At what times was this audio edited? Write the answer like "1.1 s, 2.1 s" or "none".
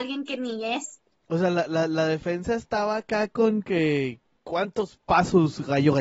none